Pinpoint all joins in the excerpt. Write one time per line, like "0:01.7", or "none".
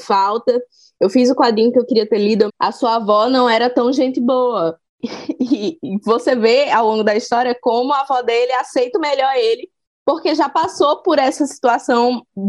0:02.5
0:04.9
0:08.9